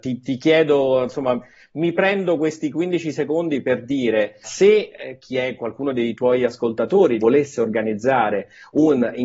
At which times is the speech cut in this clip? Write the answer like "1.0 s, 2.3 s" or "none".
4.4 s, 7.2 s

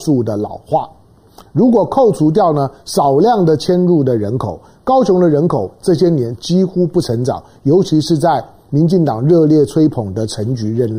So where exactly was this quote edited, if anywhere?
1.4 s

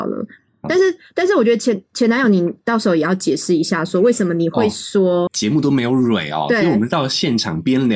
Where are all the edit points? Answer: 5.3 s

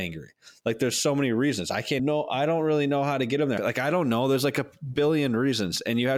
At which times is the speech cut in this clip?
2.0 s, 3.6 s

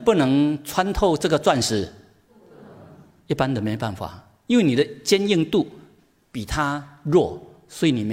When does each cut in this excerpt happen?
none

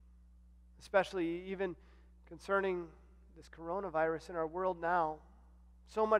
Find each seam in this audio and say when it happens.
none

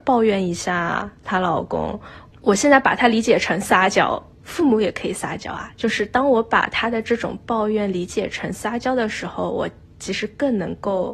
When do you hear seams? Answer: 4.3 s

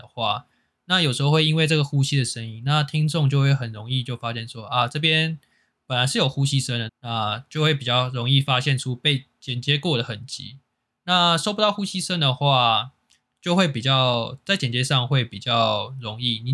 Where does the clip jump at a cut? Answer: 6.9 s

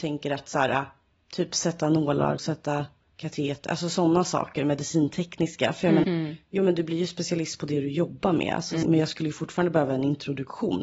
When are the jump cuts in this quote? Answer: 2.4 s, 6.0 s, 8.8 s

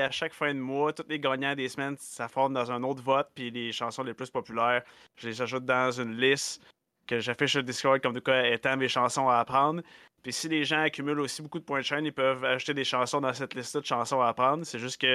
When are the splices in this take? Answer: none

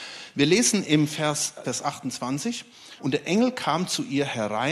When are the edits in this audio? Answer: 1.6 s, 3.0 s

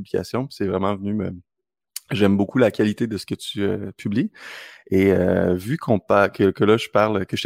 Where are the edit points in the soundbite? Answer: none

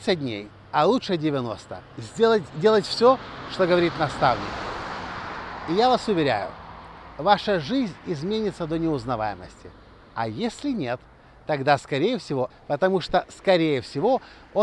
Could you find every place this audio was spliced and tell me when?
12.5 s

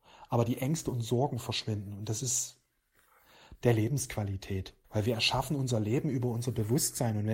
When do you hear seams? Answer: 3.6 s, 4.8 s

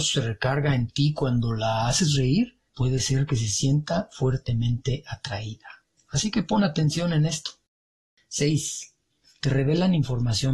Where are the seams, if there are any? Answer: 2.7 s

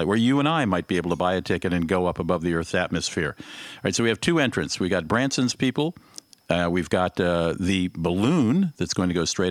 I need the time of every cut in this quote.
none

